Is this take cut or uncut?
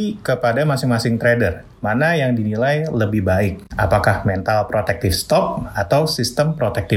uncut